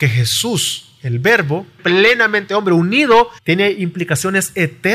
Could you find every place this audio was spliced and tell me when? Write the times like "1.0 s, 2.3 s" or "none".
1.8 s, 3.4 s